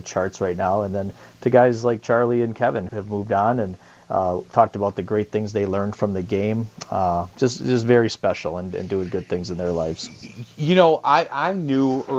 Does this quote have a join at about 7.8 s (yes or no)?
no